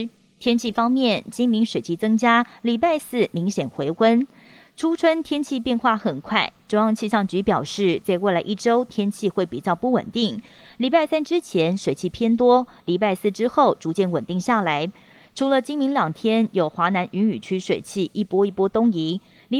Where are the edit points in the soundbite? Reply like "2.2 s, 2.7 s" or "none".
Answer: none